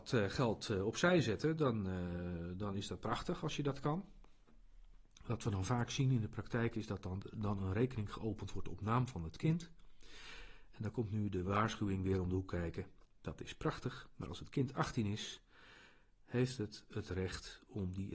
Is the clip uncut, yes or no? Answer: yes